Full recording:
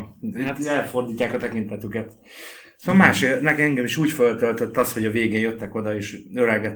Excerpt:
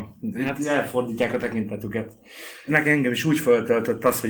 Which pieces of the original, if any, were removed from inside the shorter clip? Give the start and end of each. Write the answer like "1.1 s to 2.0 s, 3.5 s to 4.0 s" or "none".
2.7 s to 3.4 s